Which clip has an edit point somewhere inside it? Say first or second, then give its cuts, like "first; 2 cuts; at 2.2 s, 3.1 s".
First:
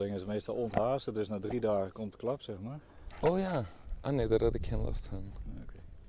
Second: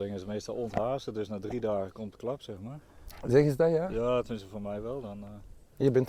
first; 1 cut; at 3.2 s